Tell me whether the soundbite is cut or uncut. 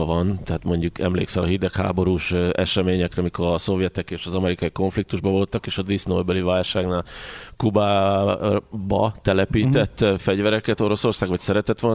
uncut